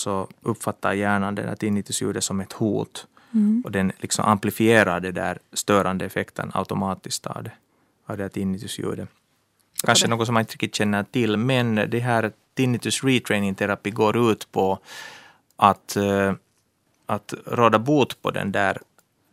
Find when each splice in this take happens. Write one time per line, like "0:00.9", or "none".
0:09.8